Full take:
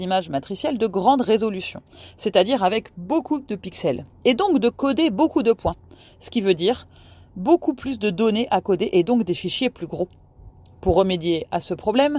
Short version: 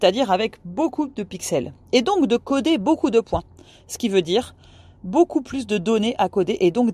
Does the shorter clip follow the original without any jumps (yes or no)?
yes